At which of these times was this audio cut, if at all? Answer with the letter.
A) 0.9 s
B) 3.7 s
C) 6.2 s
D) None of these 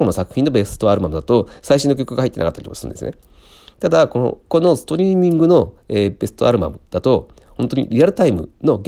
D